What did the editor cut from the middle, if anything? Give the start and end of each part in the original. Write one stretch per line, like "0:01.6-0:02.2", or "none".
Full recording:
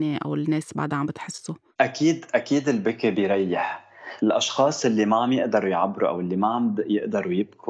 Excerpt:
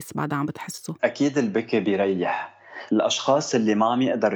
0:01.6-0:02.3

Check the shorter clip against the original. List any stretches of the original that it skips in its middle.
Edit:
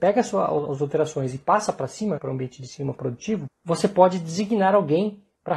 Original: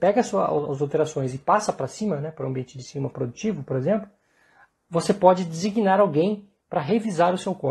0:02.2-0:02.3
0:03.6-0:04.7

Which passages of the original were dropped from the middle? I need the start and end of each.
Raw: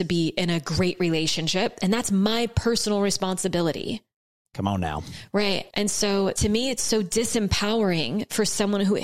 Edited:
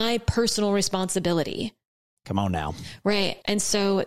none

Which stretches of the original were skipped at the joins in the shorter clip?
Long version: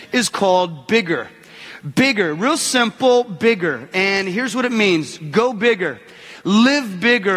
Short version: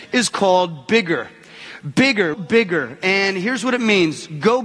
0:02.3-0:03.2

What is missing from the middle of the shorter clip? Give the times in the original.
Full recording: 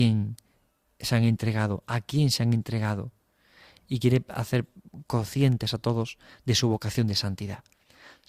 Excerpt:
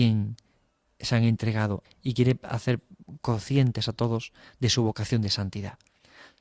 0:01.8-0:03.7

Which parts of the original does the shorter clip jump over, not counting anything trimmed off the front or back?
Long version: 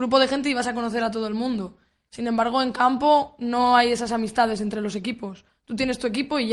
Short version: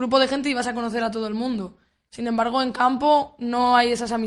none

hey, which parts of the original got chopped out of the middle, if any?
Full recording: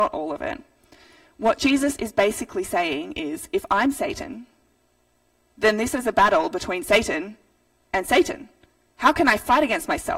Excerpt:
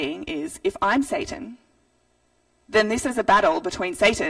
none

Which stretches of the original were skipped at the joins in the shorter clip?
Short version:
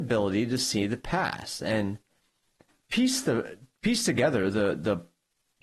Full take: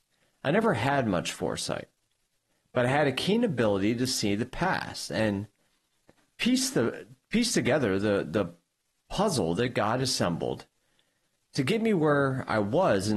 none

